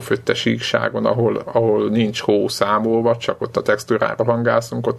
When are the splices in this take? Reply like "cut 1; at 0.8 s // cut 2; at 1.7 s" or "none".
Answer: none